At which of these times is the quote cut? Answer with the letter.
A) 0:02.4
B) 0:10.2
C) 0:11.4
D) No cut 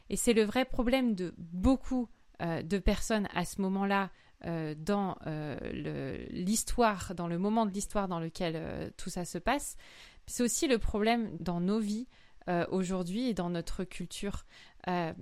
C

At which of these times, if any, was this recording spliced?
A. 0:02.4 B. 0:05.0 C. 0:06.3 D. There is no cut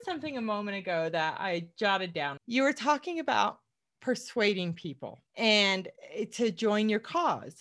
A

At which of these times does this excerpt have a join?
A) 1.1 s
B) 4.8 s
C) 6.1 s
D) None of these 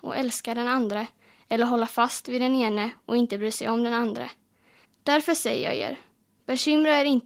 B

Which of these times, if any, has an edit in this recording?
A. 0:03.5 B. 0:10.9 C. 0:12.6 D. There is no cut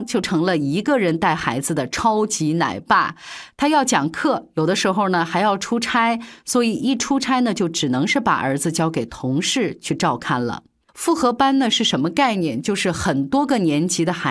B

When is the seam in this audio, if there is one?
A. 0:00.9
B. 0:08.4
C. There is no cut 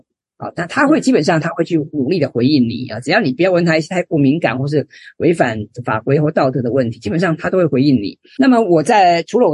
B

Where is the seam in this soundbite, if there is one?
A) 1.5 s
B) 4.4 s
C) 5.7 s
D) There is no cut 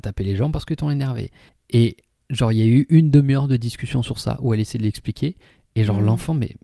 D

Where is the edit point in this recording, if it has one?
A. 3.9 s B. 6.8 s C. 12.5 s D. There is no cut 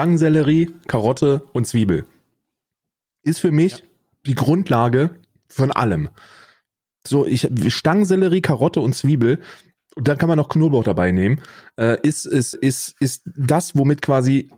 C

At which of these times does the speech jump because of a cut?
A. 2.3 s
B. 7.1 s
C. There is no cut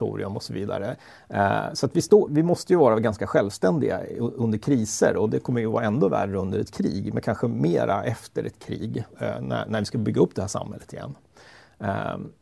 A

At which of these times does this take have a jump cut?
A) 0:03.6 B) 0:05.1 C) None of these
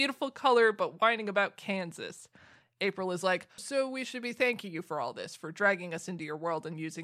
A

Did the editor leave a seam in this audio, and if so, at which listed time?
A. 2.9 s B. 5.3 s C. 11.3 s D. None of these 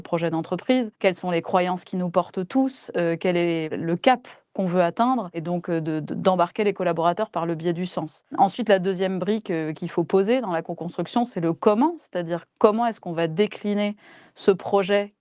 D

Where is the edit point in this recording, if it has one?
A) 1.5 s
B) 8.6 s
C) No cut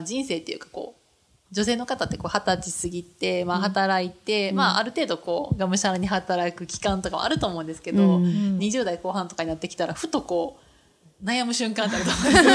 B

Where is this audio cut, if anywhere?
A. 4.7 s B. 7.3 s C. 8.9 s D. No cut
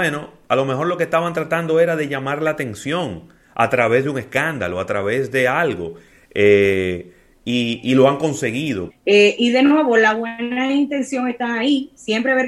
C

